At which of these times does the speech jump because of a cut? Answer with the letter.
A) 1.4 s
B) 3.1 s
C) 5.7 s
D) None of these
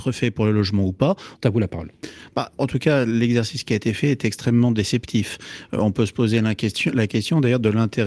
A